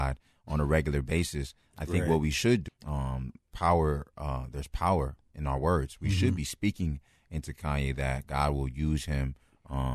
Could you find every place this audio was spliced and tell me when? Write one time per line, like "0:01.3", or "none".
0:02.7